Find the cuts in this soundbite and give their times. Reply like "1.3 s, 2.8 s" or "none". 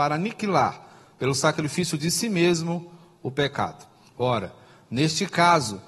4.1 s